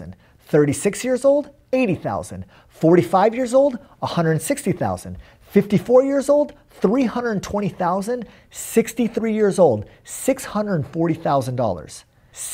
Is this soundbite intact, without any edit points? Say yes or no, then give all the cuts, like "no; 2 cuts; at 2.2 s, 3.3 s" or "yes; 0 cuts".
yes; 0 cuts